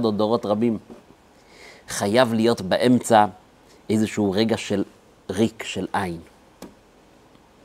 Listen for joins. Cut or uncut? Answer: uncut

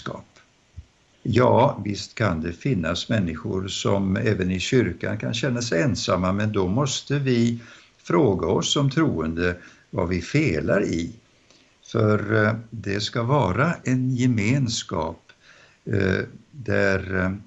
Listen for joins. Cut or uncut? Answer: cut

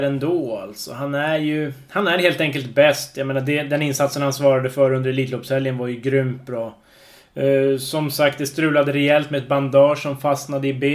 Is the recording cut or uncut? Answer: uncut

